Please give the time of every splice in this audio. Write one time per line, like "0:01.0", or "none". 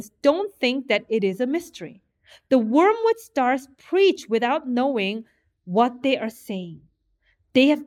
none